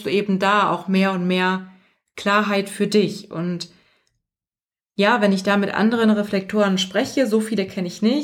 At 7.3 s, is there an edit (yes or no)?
no